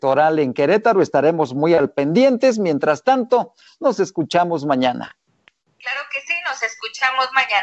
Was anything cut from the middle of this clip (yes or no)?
no